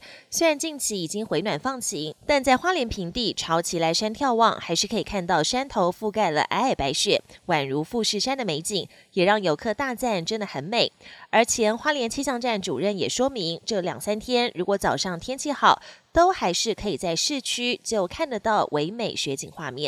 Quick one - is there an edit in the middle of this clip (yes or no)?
no